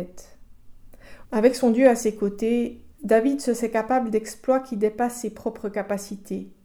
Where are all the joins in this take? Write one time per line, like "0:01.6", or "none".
0:01.2
0:02.9